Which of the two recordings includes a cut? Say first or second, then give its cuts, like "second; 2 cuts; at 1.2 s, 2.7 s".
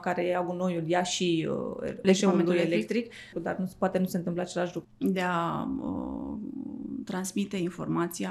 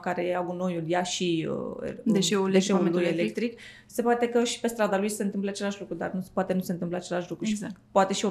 first; 3 cuts; at 2.0 s, 3.3 s, 4.8 s